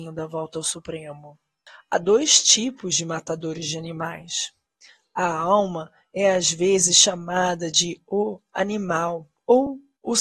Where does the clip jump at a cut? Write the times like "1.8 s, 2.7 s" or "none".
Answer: none